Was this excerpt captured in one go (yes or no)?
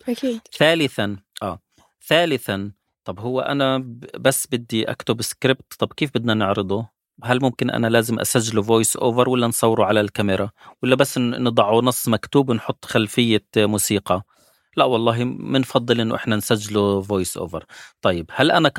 yes